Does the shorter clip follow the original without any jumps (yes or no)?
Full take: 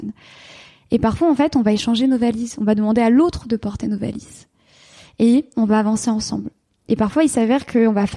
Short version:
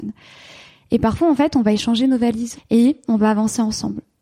no